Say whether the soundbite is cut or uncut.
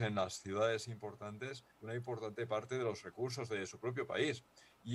cut